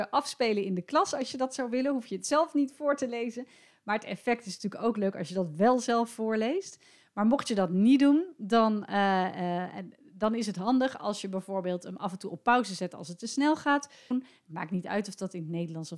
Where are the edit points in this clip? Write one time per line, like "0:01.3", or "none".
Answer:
0:14.1